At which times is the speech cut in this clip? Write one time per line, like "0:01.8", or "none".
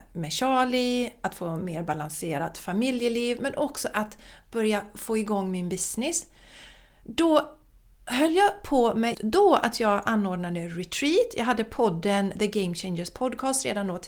0:09.1